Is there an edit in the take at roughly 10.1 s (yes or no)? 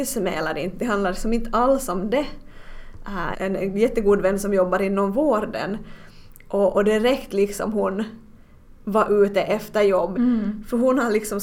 yes